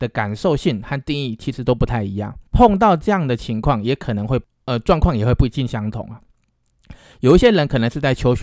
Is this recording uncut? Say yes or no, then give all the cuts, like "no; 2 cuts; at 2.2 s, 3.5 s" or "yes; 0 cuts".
no; 1 cut; at 2.5 s